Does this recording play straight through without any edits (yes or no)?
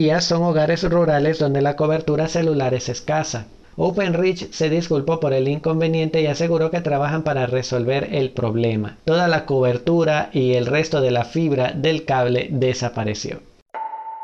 no